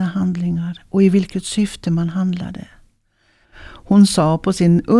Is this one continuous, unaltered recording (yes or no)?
no